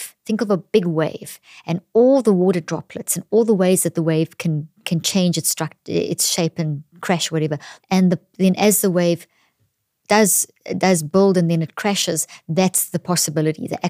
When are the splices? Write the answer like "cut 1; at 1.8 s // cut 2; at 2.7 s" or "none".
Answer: cut 1; at 7.8 s

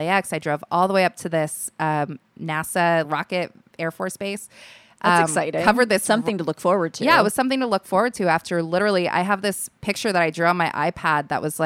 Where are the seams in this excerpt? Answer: cut 1; at 3.0 s

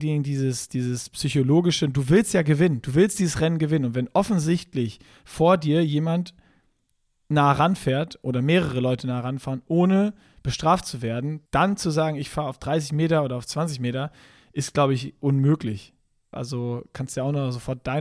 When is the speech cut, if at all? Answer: cut 1; at 11.5 s // cut 2; at 16.3 s

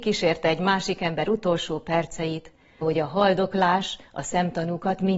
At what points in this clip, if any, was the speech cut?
cut 1; at 2.8 s

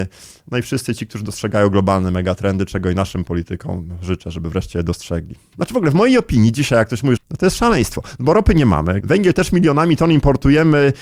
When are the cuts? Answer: cut 1; at 5.5 s // cut 2; at 7.2 s // cut 3; at 9.0 s

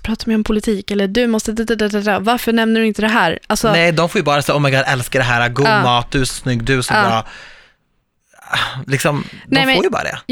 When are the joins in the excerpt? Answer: none

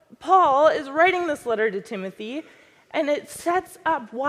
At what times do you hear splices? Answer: none

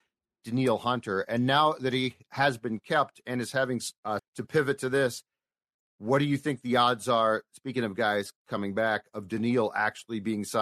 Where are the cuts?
cut 1; at 4.2 s

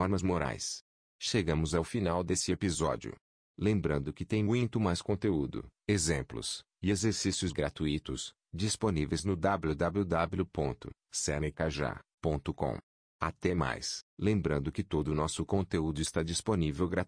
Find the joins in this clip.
cut 1; at 14.0 s

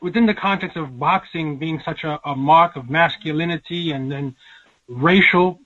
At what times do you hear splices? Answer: none

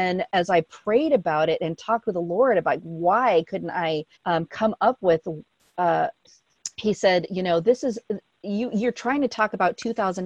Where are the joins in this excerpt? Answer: cut 1; at 4.1 s // cut 2; at 6.2 s

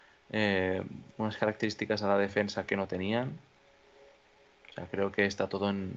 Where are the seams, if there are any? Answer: cut 1; at 4.6 s

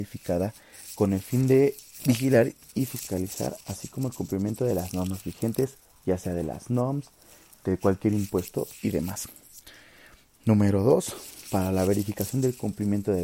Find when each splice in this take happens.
none

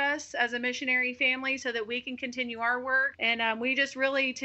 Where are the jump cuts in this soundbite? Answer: cut 1; at 3.1 s

